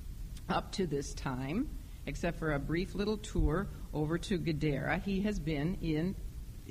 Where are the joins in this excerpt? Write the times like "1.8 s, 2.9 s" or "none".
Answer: none